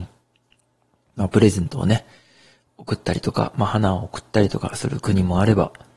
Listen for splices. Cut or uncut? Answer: uncut